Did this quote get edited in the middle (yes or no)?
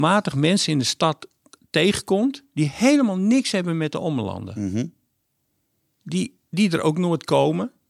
no